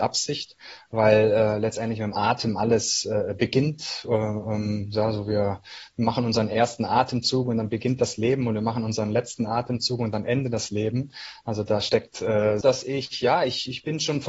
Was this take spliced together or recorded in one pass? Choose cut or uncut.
cut